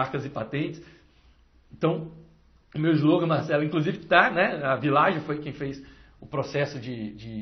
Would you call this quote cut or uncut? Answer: uncut